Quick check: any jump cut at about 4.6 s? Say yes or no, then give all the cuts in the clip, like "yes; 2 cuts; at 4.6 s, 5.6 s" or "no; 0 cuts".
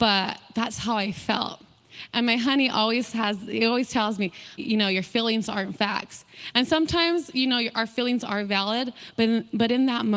yes; 1 cut; at 4.6 s